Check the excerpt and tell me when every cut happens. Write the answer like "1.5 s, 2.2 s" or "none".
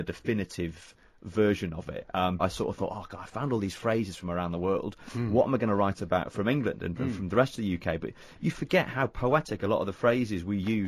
2.4 s

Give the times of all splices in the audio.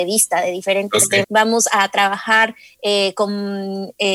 1.2 s

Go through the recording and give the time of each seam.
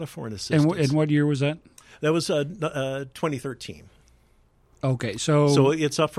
none

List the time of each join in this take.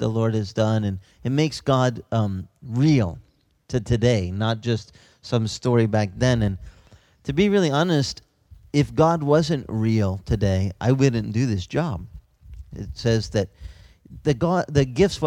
12.7 s

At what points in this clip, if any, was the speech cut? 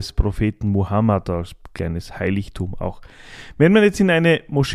none

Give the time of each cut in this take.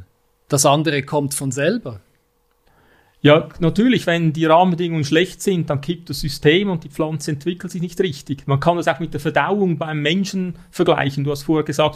none

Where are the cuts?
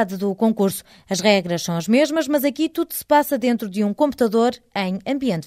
none

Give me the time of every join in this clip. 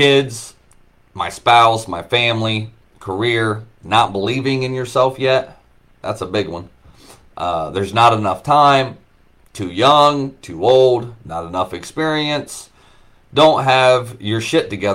none

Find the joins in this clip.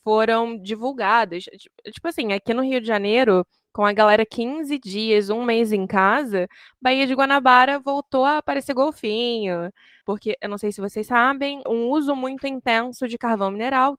10.0 s, 11.7 s

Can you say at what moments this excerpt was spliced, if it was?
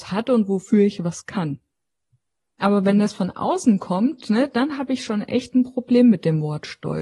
2.6 s

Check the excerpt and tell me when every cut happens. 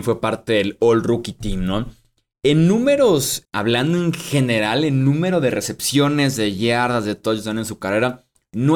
3.5 s

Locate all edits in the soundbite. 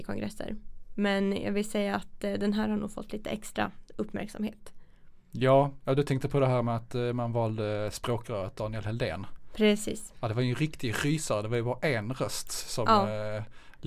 none

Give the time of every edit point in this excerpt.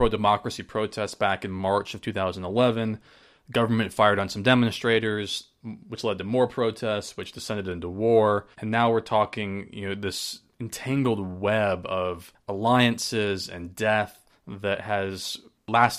8.5 s

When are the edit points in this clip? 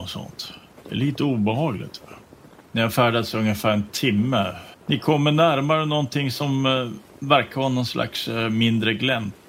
none

